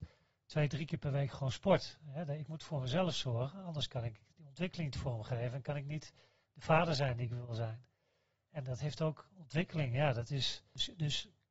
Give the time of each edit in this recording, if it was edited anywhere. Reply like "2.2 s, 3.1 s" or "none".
none